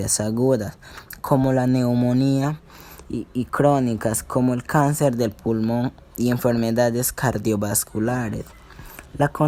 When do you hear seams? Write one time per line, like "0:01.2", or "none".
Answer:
none